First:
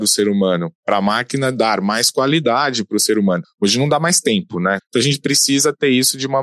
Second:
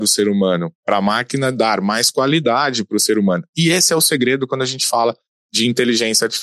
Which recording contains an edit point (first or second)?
first